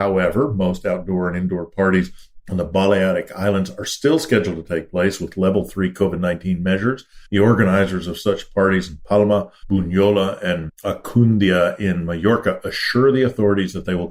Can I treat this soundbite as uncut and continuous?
yes; 0 cuts

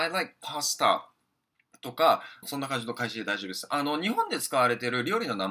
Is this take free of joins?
no; 1 cut; at 2.4 s

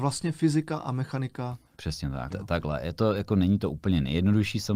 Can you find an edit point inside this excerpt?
yes; 1 cut; at 2.3 s

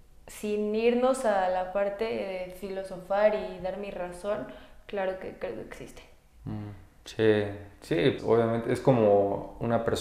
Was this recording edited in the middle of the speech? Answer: yes; 2 cuts; at 7.0 s, 8.2 s

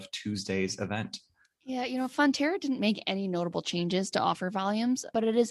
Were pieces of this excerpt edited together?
no; 0 cuts

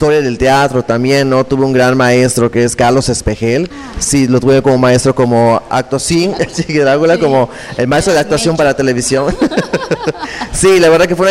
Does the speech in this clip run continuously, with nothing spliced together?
no; 1 cut; at 3.7 s

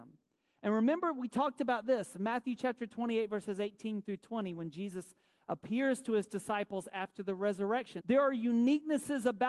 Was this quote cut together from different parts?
yes; 1 cut; at 8.0 s

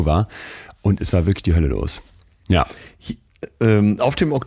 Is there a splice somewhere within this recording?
no; 0 cuts

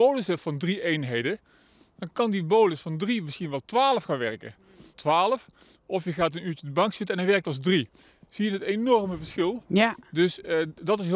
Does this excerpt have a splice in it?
yes; 1 cut; at 4.9 s

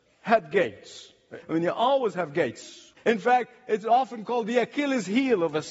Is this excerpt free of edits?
no; 2 cuts; at 1.4 s, 3.0 s

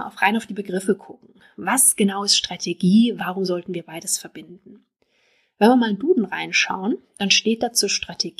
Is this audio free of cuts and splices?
no; 1 cut; at 3.2 s

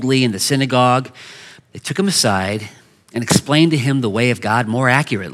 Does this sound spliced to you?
yes; 1 cut; at 1.6 s

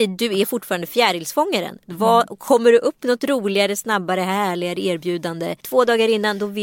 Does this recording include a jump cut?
yes; 1 cut; at 5.6 s

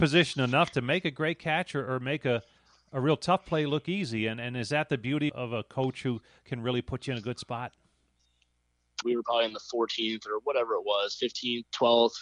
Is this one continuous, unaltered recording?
no; 2 cuts; at 5.3 s, 9.0 s

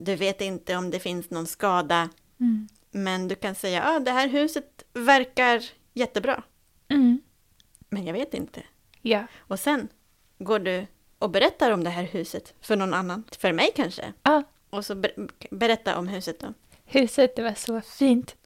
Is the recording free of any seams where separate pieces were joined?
no; 1 cut; at 13.3 s

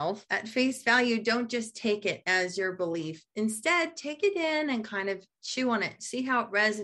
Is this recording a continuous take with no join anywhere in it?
yes; 0 cuts

